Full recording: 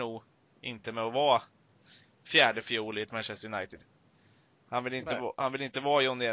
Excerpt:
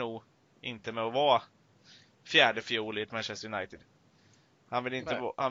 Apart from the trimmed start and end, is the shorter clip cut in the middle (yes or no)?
no